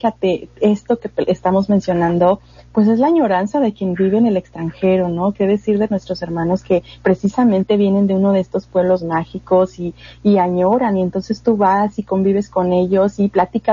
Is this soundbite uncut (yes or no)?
yes